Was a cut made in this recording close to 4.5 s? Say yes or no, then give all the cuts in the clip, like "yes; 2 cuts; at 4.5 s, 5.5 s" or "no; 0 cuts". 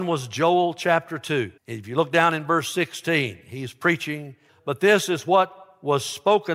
yes; 2 cuts; at 1.6 s, 4.5 s